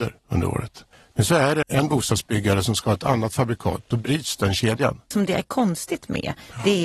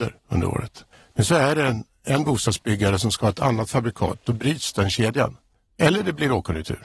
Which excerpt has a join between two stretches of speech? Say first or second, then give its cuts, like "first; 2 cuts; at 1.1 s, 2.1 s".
first; 2 cuts; at 1.6 s, 5.1 s